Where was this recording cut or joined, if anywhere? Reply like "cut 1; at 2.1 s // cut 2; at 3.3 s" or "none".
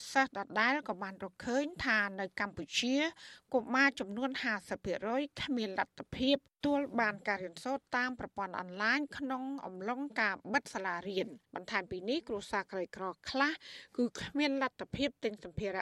cut 1; at 6.6 s // cut 2; at 11.4 s

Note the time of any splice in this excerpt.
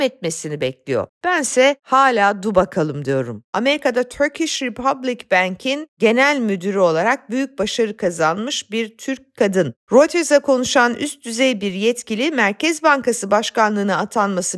cut 1; at 3.5 s

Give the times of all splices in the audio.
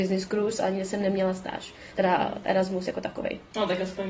none

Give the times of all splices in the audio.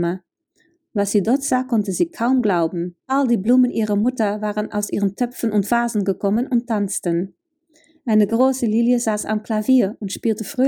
cut 1; at 3.0 s

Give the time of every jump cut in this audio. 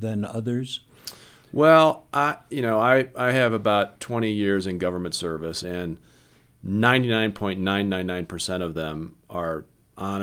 cut 1; at 5.6 s

